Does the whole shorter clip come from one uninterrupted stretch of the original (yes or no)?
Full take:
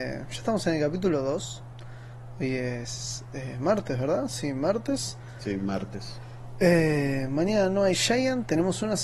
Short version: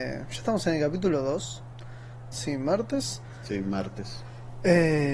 no